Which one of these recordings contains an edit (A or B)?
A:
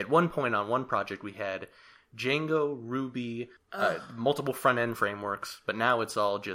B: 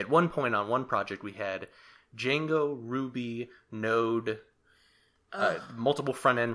A